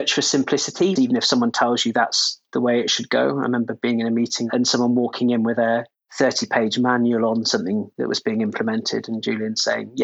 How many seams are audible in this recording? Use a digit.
1